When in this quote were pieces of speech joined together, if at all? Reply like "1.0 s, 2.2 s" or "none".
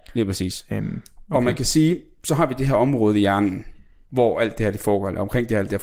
none